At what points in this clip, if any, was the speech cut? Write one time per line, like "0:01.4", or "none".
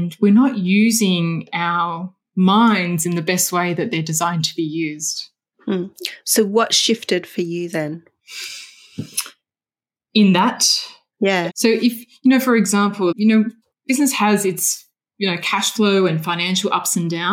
0:11.5
0:13.1